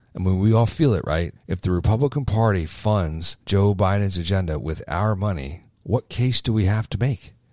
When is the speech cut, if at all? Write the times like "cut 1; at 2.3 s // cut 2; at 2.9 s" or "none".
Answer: cut 1; at 1.4 s // cut 2; at 3.4 s